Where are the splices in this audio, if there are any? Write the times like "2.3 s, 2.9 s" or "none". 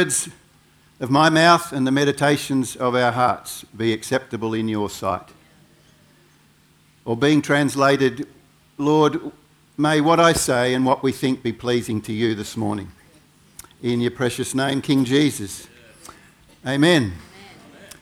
none